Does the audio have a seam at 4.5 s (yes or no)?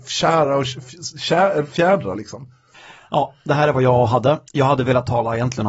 yes